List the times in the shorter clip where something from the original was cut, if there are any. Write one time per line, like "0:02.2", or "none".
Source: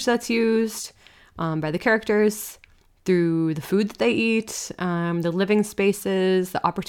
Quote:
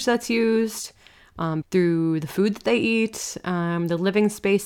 0:01.6